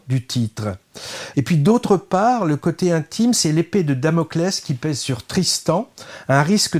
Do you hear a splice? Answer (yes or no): yes